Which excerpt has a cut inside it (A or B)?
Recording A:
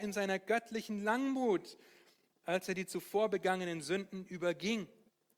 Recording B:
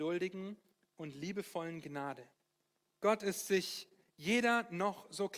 B